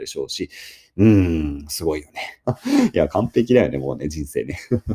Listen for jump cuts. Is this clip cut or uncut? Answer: cut